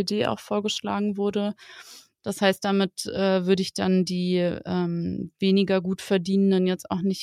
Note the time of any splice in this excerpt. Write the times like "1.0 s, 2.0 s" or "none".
2.2 s